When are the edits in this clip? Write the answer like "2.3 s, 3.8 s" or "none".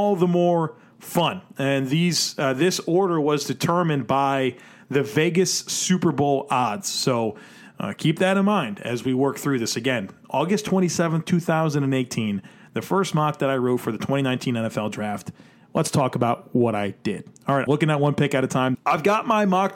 17.7 s, 18.7 s